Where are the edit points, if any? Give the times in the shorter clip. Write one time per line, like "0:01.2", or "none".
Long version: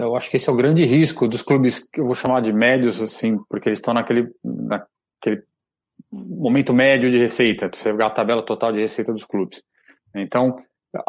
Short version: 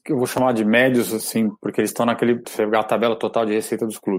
0:02.4